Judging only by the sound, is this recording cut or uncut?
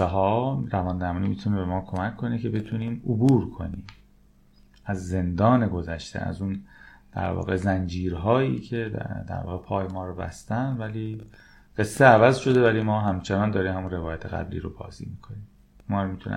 uncut